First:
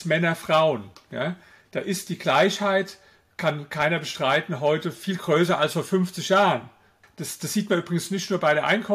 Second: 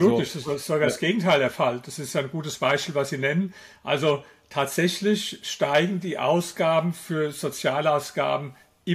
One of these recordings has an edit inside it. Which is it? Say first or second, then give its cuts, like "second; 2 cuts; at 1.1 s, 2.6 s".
first; 1 cut; at 7.0 s